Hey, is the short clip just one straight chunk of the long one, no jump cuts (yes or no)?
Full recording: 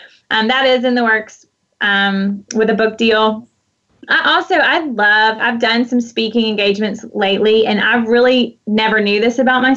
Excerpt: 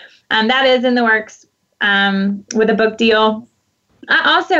yes